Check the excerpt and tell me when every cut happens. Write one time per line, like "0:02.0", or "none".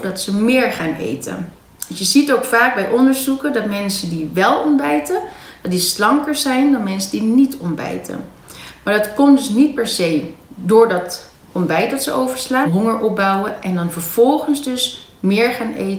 0:01.8
0:12.6